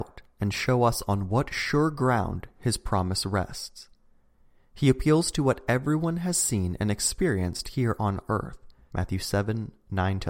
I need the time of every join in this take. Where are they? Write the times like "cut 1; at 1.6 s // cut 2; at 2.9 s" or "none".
cut 1; at 8.9 s